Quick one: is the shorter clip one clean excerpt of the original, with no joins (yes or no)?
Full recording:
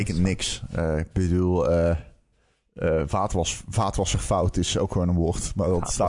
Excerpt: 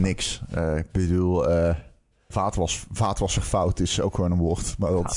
no